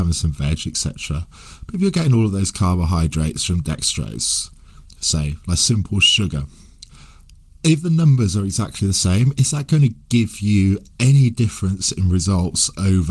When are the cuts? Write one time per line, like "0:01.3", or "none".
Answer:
none

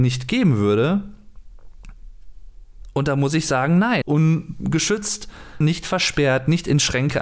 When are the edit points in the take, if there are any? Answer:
0:04.0
0:05.6

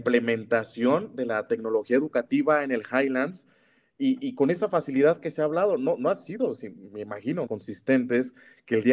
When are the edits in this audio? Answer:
0:07.5

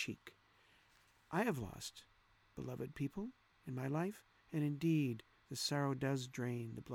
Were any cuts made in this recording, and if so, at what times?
none

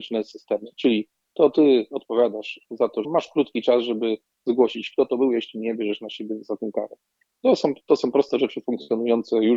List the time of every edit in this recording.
0:03.0

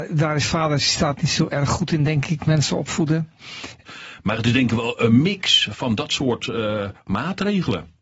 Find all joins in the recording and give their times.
0:03.8

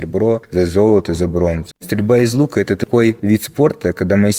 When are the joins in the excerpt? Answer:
0:01.7

